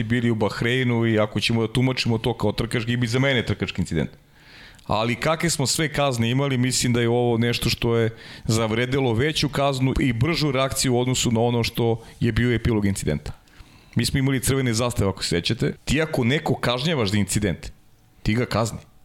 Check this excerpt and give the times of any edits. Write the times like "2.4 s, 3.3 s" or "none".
9.9 s, 15.8 s